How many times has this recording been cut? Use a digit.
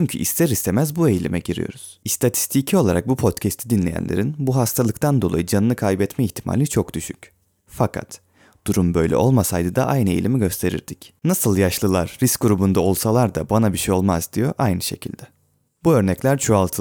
0